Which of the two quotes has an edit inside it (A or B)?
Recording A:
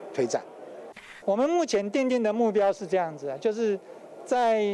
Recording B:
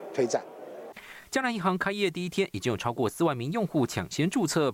A